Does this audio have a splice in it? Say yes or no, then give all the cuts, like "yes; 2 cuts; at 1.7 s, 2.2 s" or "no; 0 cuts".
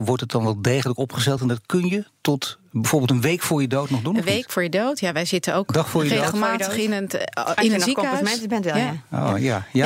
no; 0 cuts